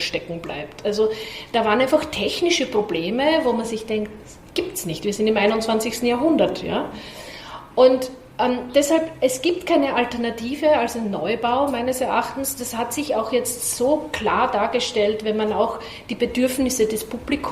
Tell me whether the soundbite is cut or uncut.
uncut